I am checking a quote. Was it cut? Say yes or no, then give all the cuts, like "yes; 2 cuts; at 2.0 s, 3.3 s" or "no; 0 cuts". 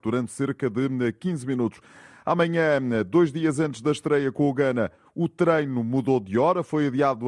no; 0 cuts